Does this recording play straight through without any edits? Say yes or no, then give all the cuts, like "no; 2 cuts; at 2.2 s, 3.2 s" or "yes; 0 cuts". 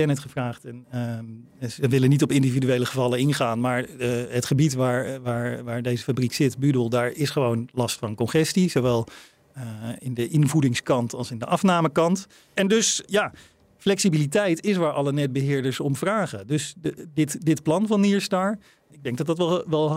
yes; 0 cuts